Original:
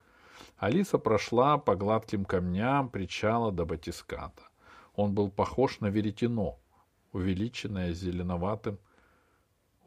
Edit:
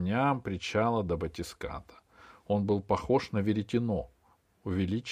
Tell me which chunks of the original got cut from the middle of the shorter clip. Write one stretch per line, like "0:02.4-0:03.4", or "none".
none